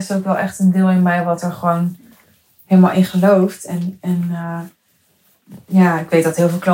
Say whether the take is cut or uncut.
uncut